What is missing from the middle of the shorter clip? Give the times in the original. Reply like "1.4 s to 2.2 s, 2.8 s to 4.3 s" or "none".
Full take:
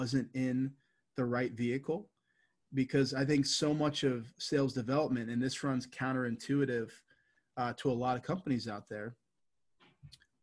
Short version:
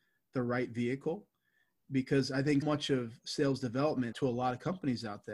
3.4 s to 3.8 s, 5.3 s to 7.7 s